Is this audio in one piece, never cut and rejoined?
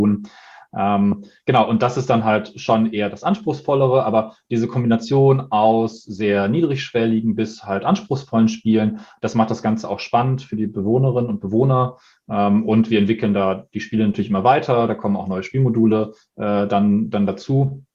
yes; 0 cuts

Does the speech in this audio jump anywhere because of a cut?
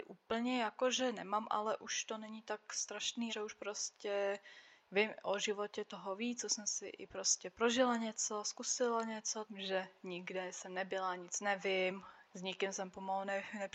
yes; 3 cuts; at 3.3 s, 9.4 s, 12.3 s

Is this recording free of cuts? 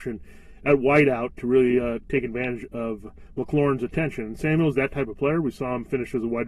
yes; 0 cuts

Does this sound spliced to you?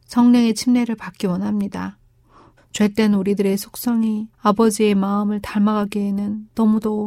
yes; 2 cuts; at 2.6 s, 4.3 s

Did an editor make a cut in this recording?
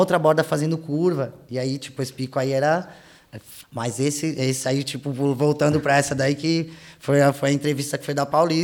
yes; 1 cut; at 3.6 s

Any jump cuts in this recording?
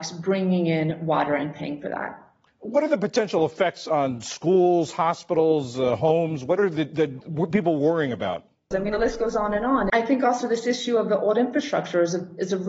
yes; 2 cuts; at 8.7 s, 9.9 s

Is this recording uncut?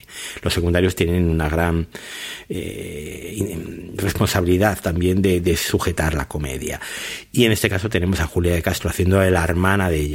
yes; 0 cuts

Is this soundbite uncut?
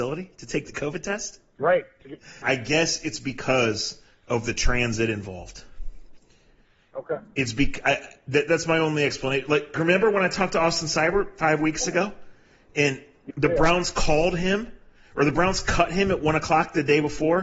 no; 3 cuts; at 2.4 s, 9.7 s, 13.3 s

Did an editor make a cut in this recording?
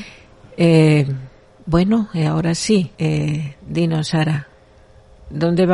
yes; 1 cut; at 2.9 s

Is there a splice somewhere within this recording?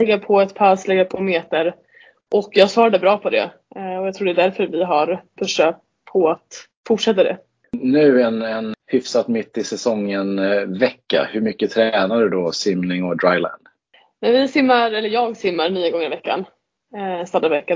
no; 0 cuts

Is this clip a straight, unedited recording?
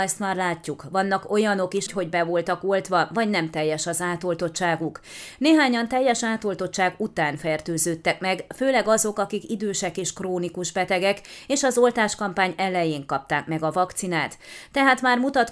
no; 1 cut; at 1.9 s

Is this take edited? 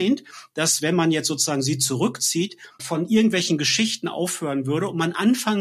yes; 1 cut; at 2.8 s

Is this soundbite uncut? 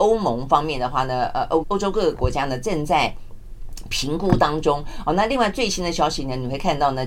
no; 1 cut; at 1.6 s

